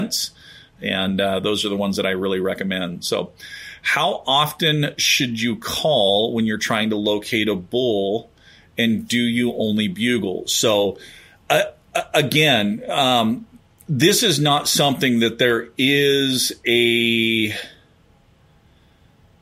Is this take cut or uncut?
uncut